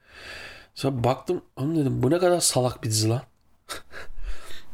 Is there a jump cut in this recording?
yes; 1 cut; at 1.5 s

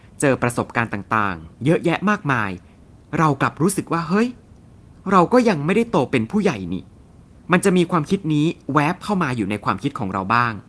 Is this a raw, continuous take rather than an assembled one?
yes; 0 cuts

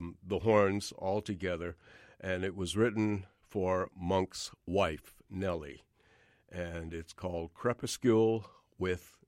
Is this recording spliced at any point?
no; 0 cuts

